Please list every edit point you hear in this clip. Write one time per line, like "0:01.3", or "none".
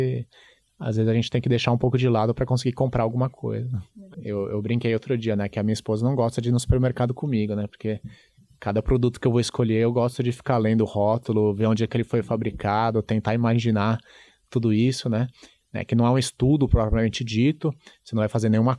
0:15.6